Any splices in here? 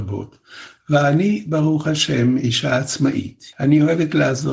yes; 1 cut; at 3.5 s

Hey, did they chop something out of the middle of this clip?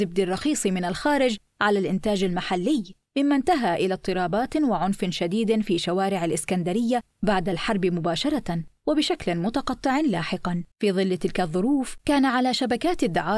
yes; 1 cut; at 10.7 s

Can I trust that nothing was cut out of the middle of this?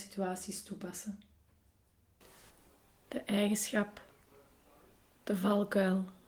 yes; 0 cuts

